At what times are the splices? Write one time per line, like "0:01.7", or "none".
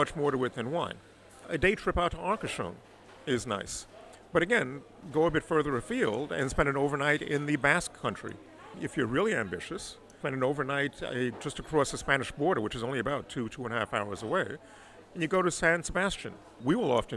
0:01.4